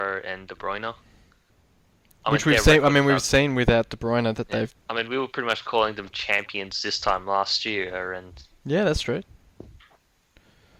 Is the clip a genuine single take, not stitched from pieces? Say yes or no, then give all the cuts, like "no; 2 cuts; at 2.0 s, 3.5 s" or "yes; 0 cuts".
no; 1 cut; at 4.7 s